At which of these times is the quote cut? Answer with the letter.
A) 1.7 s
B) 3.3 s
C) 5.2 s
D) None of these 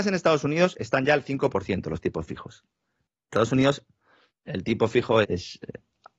C